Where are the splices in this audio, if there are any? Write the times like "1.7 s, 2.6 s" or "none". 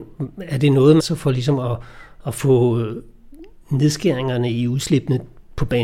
1.0 s